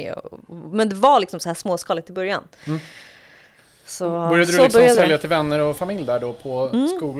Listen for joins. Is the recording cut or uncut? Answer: uncut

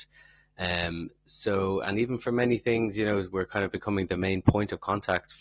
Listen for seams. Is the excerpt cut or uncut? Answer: uncut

